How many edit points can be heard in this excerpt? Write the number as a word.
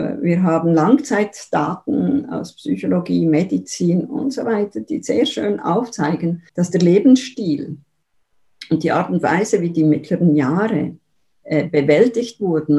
one